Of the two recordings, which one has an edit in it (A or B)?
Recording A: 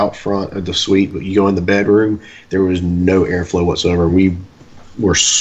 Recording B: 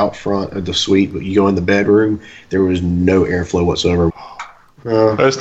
B